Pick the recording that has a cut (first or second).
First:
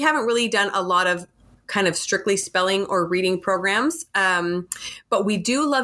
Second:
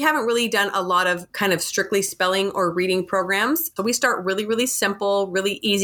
second